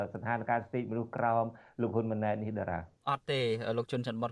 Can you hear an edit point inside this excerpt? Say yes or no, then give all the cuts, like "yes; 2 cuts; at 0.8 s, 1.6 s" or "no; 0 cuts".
yes; 1 cut; at 3.0 s